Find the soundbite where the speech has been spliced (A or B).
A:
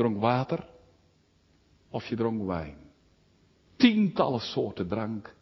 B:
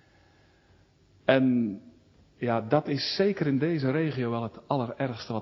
A